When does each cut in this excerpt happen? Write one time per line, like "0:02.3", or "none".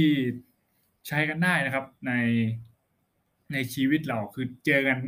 0:02.0